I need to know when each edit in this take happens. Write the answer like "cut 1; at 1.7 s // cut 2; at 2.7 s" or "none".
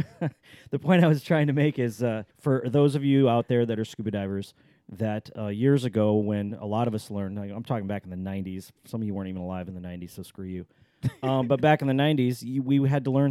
cut 1; at 2.3 s